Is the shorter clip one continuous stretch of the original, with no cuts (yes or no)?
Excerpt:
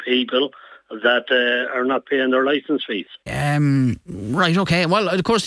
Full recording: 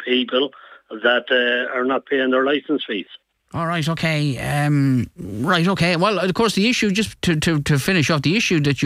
no